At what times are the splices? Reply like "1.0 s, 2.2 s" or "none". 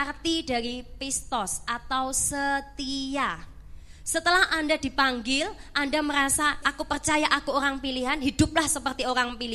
6.6 s